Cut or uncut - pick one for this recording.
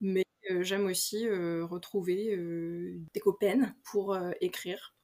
uncut